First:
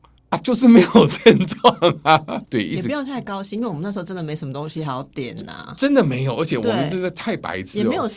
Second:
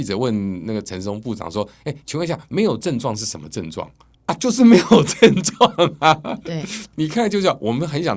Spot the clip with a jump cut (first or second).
first